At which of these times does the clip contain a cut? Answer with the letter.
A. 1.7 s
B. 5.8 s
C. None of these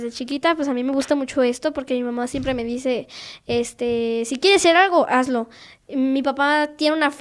C